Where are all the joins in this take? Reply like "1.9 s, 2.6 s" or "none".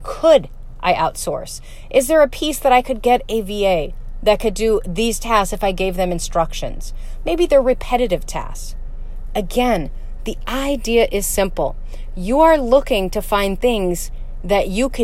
none